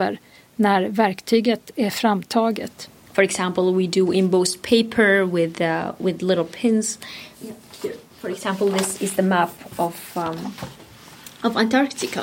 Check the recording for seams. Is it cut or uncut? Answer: cut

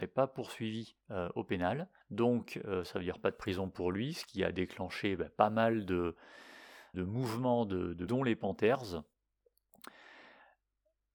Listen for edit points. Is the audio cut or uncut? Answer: cut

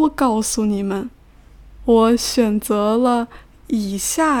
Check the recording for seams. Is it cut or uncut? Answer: cut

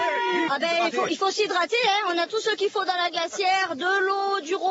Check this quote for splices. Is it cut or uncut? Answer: uncut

